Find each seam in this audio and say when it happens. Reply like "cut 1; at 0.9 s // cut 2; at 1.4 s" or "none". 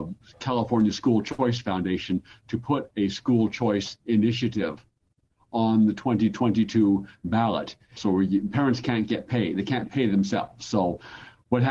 cut 1; at 8.0 s